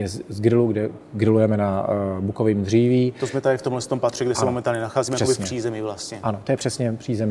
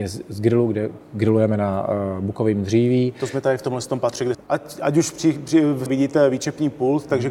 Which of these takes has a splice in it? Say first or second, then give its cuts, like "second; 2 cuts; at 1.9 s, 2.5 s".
second; 2 cuts; at 4.3 s, 5.9 s